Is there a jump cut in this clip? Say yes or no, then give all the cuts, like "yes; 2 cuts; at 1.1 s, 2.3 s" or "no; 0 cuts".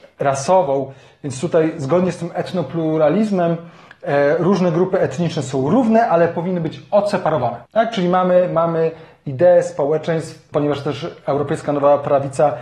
yes; 2 cuts; at 7.7 s, 10.5 s